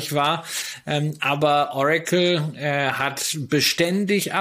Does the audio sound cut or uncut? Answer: uncut